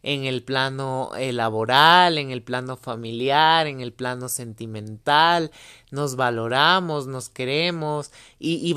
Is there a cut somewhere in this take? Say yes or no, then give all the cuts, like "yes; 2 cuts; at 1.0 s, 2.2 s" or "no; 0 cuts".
no; 0 cuts